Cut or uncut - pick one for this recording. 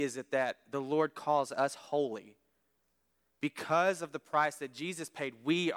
uncut